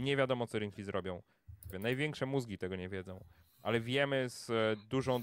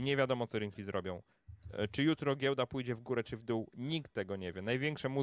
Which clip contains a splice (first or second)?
first